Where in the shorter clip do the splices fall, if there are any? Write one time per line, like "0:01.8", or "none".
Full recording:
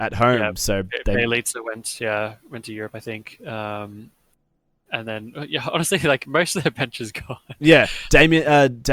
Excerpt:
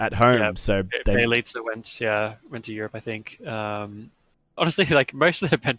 0:04.6